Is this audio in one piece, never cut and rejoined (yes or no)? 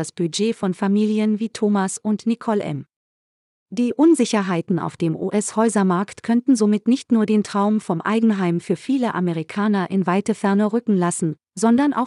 no